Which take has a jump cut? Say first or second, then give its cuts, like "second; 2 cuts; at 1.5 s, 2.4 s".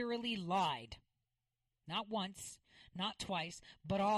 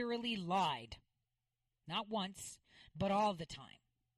second; 1 cut; at 2.9 s